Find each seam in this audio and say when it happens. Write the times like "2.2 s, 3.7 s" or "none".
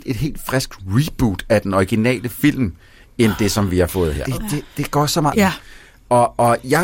4.2 s, 5.3 s